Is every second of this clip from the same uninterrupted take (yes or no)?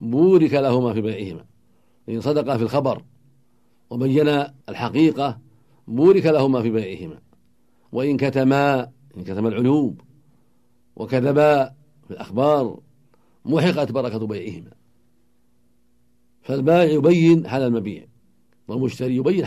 no